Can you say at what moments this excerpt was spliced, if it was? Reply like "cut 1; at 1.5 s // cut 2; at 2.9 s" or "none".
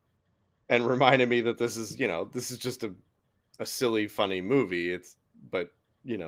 none